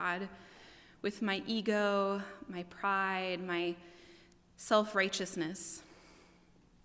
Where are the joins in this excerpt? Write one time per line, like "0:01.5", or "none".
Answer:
none